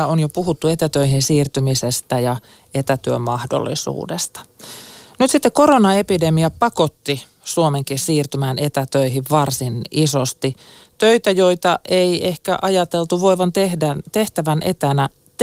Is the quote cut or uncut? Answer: uncut